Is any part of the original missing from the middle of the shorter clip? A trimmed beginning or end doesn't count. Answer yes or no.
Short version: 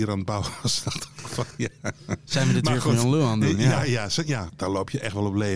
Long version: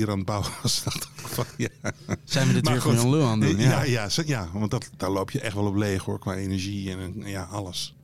yes